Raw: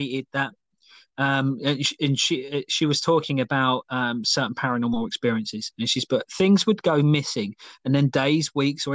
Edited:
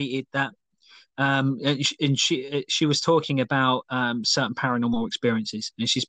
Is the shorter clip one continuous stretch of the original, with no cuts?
yes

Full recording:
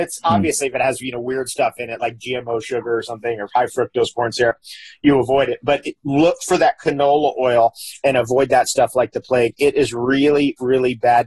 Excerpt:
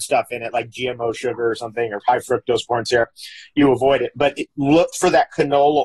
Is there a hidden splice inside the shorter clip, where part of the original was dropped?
no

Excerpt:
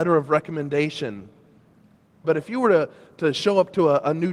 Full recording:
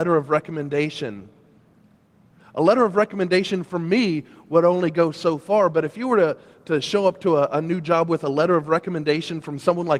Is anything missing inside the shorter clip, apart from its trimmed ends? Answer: yes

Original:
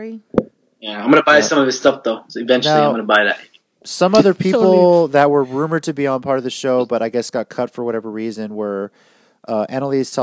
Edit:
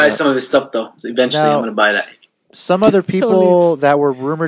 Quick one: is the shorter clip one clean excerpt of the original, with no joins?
yes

